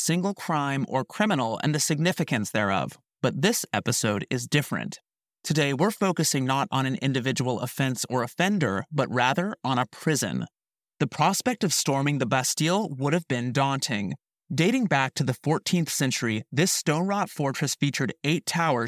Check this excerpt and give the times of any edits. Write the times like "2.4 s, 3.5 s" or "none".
none